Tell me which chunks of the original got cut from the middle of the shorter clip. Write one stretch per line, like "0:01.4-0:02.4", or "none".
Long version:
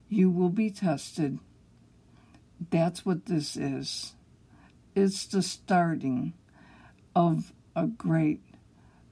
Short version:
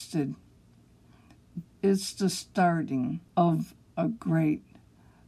0:02.7-0:04.8
0:06.4-0:07.1